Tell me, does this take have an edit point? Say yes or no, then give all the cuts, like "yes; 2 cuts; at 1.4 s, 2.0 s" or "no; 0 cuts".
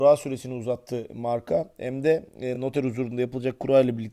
no; 0 cuts